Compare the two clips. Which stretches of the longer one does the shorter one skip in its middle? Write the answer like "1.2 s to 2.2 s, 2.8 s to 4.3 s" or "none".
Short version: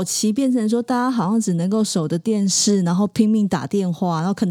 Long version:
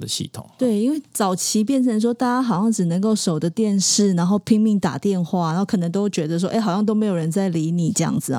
none